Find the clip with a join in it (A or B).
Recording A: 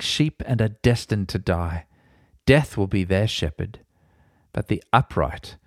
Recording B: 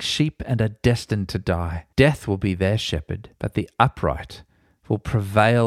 B